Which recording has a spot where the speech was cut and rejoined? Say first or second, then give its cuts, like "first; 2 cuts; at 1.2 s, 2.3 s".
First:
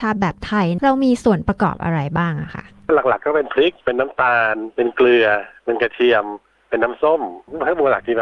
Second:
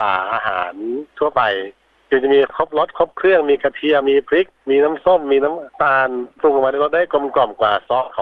second; 1 cut; at 4.0 s